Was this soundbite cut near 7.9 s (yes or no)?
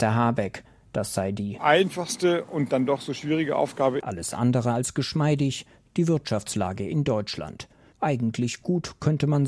yes